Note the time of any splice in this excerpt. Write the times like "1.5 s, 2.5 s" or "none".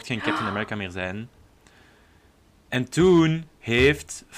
none